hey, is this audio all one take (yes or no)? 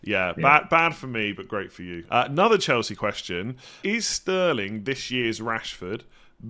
no